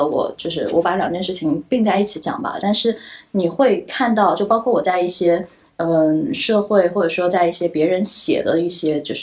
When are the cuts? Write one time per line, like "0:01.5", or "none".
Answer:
0:02.6